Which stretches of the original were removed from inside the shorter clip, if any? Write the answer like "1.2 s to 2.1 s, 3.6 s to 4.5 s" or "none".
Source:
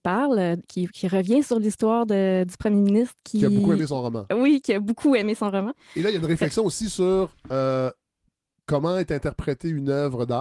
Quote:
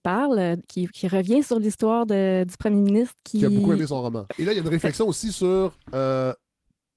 4.3 s to 5.9 s